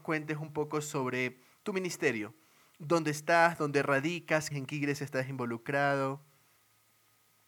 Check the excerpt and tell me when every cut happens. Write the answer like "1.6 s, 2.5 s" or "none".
4.5 s